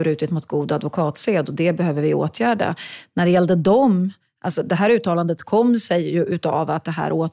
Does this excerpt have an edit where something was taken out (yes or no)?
no